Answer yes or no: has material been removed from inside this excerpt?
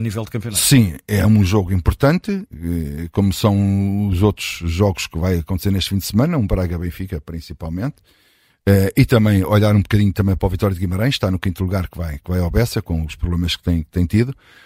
no